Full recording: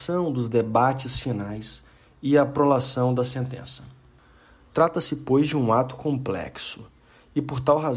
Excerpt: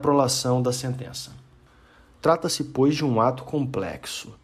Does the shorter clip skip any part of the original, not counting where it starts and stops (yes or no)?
no